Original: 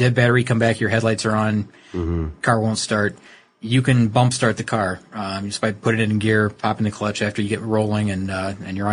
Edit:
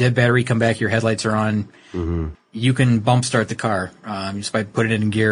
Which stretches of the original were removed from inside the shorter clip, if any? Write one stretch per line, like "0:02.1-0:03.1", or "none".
0:02.3-0:03.4